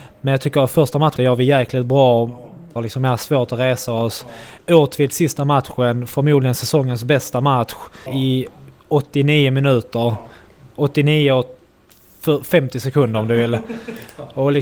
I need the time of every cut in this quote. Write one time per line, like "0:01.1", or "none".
0:01.2
0:02.8
0:08.1